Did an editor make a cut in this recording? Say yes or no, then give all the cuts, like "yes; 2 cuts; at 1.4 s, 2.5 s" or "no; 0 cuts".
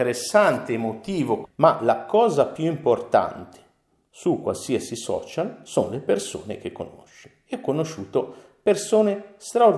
yes; 1 cut; at 1.4 s